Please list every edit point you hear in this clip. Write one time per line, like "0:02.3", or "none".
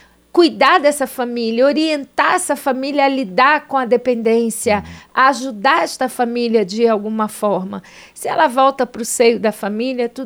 none